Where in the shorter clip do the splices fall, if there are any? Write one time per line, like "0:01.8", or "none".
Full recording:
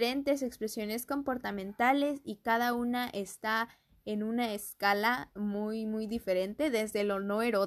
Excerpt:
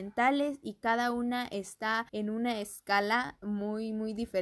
0:02.1